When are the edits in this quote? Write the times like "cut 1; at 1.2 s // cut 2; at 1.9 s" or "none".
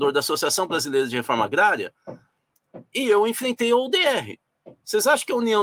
none